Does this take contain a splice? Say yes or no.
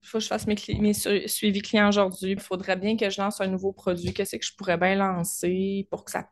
yes